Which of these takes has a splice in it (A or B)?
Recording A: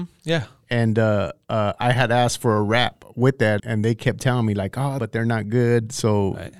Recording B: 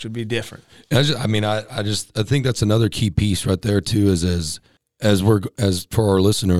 A